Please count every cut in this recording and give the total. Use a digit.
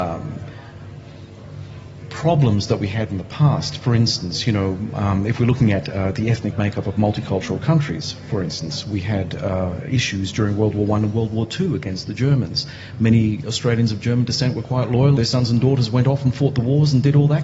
1